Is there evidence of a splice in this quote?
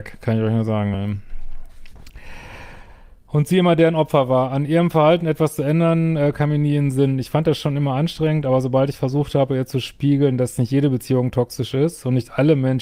no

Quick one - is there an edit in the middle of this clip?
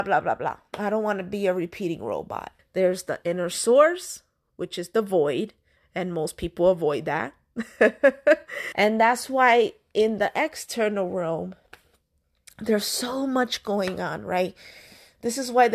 yes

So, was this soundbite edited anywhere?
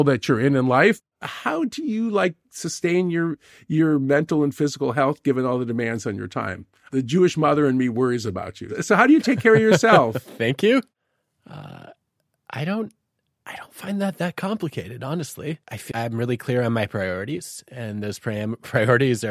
yes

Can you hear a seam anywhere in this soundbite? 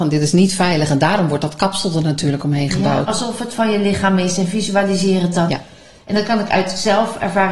yes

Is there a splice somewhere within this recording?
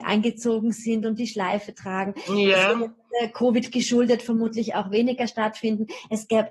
no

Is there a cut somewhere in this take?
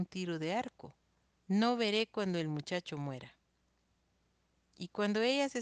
yes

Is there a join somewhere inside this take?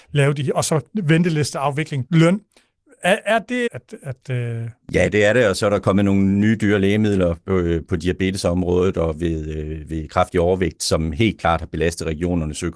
yes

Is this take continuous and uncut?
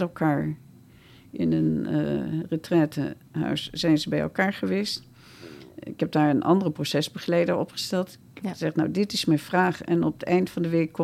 yes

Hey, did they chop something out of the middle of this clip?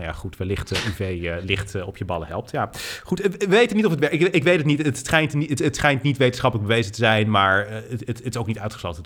no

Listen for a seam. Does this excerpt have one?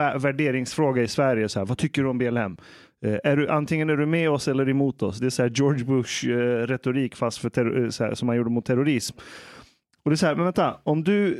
no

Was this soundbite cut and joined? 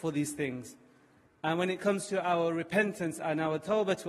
no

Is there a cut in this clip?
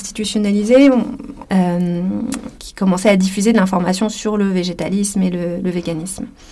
yes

